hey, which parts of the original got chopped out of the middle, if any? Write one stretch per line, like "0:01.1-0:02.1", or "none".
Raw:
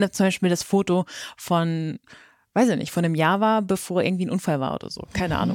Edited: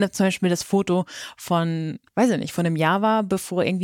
0:02.1-0:02.5